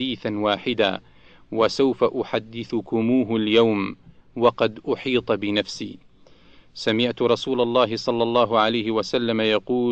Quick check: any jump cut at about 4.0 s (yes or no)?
no